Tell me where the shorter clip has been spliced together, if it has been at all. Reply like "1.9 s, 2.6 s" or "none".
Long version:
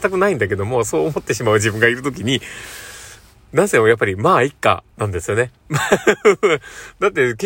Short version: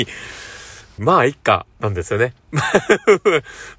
1.0 s